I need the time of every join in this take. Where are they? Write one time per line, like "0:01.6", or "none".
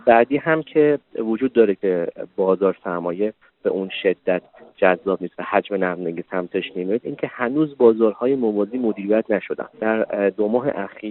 0:09.7